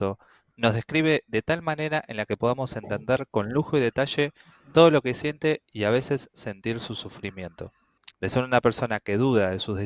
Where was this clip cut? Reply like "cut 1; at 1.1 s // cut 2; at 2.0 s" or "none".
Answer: cut 1; at 8.1 s